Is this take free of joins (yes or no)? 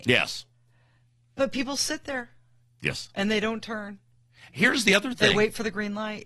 yes